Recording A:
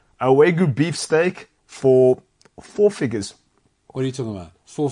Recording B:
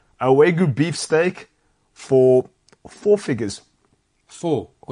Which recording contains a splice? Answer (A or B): A